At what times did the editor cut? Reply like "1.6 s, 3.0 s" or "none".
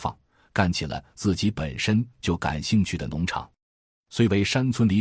none